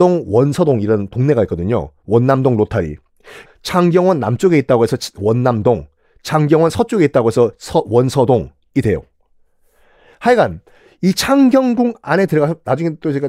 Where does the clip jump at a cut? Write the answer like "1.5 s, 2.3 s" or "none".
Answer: 3.4 s